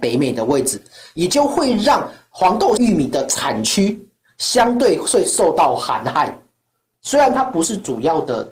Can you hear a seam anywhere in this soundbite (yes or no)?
yes